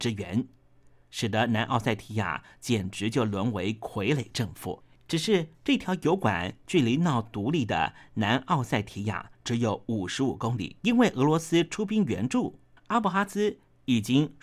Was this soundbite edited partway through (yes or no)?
yes